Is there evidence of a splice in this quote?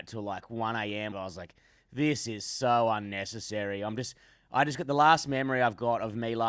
yes; 1 cut; at 1.1 s

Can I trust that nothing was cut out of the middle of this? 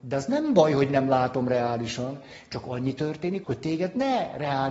no; 1 cut; at 3.4 s

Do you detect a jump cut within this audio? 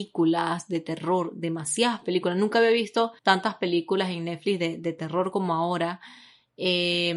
yes; 1 cut; at 3.2 s

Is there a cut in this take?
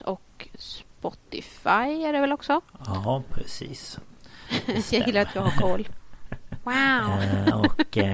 no; 0 cuts

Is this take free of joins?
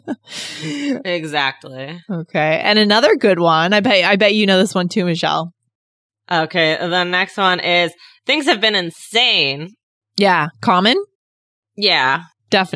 yes; 0 cuts

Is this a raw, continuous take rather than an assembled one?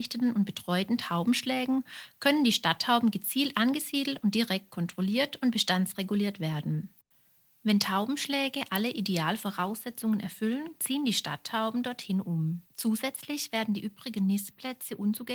no; 1 cut; at 12.7 s

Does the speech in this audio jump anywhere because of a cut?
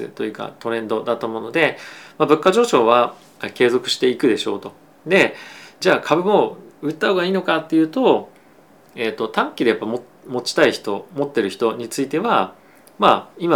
no; 0 cuts

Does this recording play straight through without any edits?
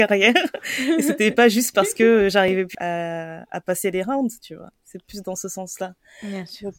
no; 1 cut; at 2.7 s

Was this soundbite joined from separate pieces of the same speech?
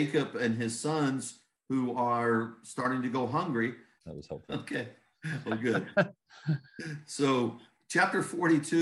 yes; 2 cuts; at 4.0 s, 5.9 s

